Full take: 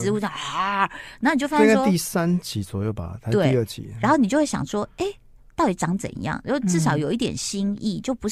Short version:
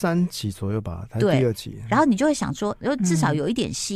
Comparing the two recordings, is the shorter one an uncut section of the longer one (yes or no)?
no